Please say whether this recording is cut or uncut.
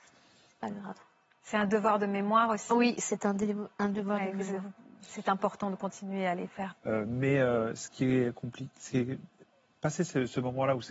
cut